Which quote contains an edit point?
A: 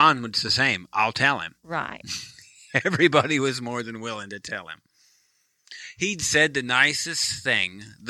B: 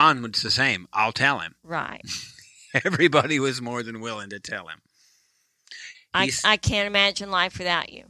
B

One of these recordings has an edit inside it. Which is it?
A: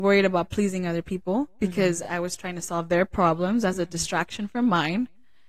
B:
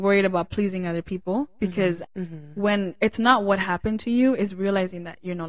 B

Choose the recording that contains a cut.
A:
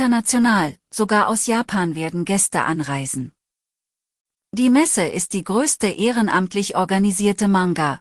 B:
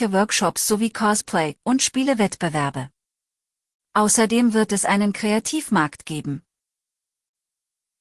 A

